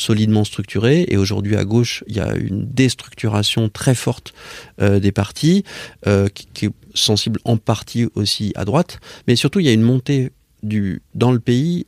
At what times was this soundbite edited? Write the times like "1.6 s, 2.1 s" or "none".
none